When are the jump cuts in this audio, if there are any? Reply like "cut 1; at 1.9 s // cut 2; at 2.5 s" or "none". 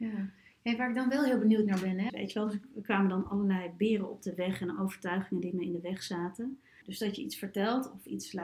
cut 1; at 2.1 s // cut 2; at 6.8 s